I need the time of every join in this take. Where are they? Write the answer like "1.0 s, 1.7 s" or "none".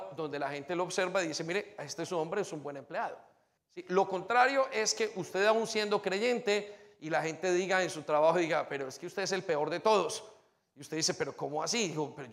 3.6 s